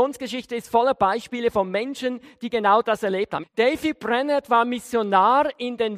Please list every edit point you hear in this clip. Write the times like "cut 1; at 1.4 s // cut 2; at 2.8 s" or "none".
cut 1; at 3.4 s